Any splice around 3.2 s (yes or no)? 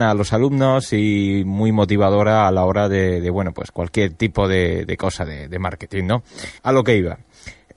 no